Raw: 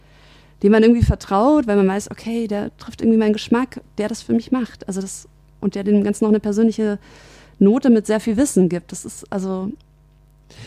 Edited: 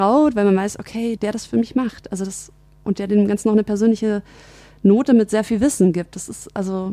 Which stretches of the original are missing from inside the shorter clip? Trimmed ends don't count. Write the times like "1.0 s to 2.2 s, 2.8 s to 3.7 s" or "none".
2.5 s to 3.9 s